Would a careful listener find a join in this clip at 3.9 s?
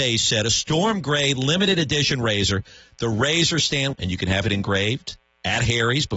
yes; 1 cut; at 3.9 s

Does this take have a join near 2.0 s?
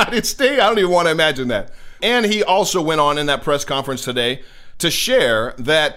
yes; 1 cut; at 2.0 s

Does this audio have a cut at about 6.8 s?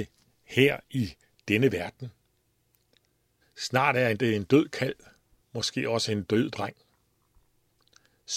no; 2 cuts; at 3.4 s, 5.4 s

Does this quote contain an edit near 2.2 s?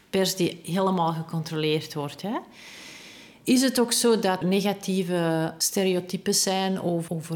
no; 1 cut; at 4.4 s

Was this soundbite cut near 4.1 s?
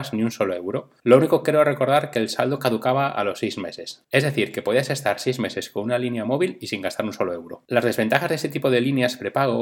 no; 0 cuts

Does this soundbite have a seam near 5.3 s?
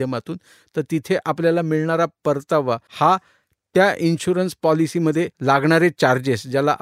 yes; 2 cuts; at 2.9 s, 5.3 s

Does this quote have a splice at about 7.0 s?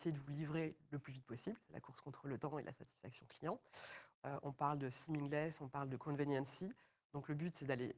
no; 1 cut; at 4.1 s

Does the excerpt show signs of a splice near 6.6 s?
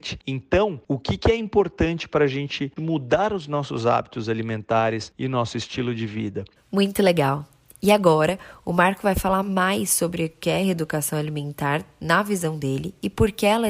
yes; 2 cuts; at 2.8 s, 6.6 s

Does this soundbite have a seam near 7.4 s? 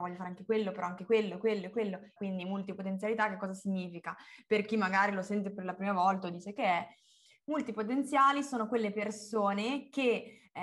no; 1 cut; at 2.2 s

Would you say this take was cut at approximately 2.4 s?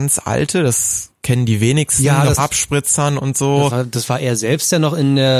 yes; 1 cut; at 2.4 s

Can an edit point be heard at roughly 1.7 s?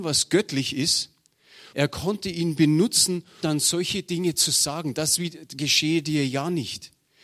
yes; 2 cuts; at 1.7 s, 3.4 s

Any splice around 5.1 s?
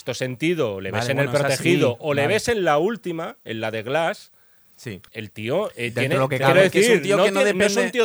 yes; 1 cut; at 5.1 s

